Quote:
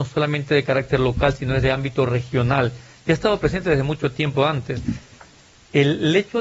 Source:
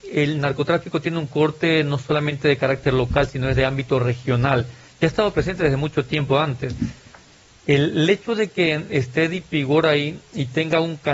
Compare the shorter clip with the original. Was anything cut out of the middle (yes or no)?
no